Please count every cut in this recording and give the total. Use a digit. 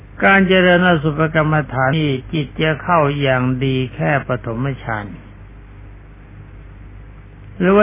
1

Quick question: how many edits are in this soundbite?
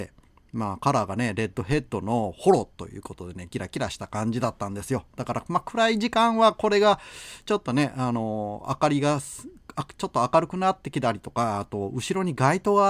0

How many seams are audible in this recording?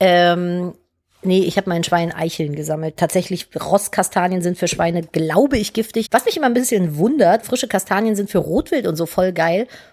2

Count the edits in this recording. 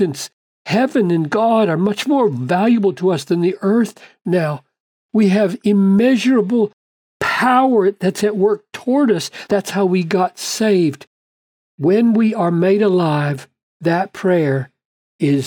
0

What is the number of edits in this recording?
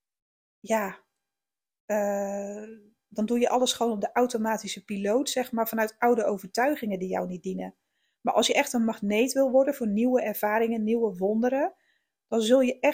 0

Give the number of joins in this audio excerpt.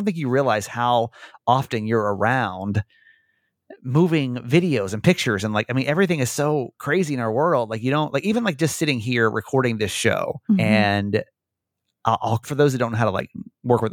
2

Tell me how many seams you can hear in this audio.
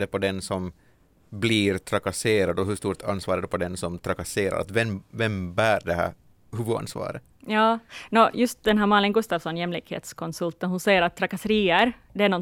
0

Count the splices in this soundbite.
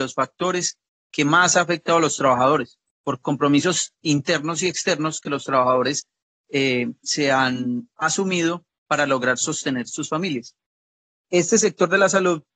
0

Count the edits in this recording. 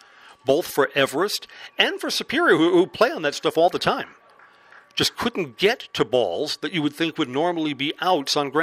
0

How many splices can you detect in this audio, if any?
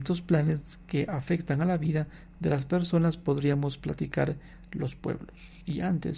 0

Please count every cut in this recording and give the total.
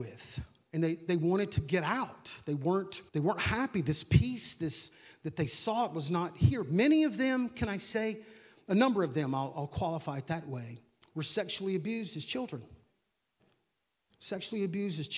1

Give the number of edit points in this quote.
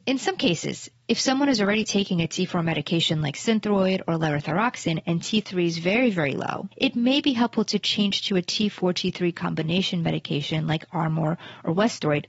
1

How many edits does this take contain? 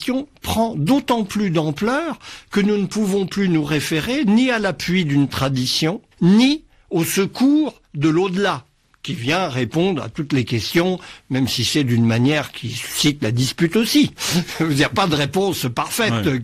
2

